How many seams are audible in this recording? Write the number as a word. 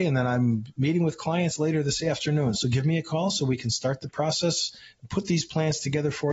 one